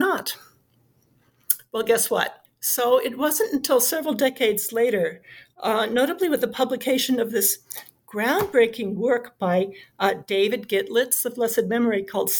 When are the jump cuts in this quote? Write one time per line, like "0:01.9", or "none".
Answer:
0:02.5